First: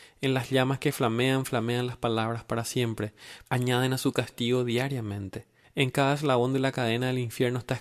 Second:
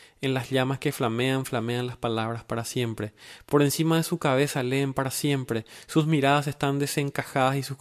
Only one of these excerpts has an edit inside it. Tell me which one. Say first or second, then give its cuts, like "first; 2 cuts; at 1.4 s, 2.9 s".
first; 2 cuts; at 3.5 s, 5.6 s